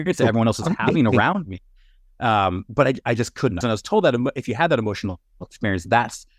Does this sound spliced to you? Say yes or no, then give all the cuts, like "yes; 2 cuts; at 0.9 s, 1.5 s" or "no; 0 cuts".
yes; 1 cut; at 3.6 s